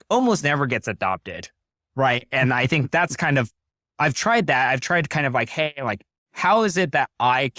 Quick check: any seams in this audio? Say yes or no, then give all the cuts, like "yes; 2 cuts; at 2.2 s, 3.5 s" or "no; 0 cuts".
no; 0 cuts